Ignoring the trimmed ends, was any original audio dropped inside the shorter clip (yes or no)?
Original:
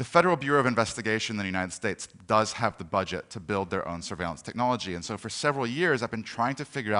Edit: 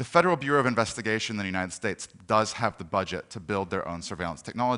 no